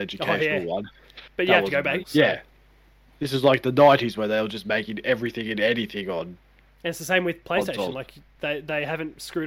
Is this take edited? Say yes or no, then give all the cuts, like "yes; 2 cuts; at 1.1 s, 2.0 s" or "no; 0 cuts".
yes; 1 cut; at 2.0 s